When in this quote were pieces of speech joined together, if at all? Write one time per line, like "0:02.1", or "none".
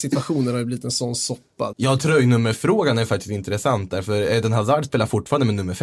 0:01.7